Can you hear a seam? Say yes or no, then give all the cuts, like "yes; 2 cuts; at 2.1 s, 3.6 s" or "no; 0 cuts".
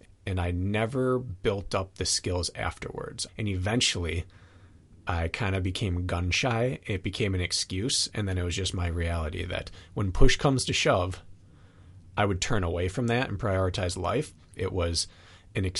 yes; 2 cuts; at 3.3 s, 14.6 s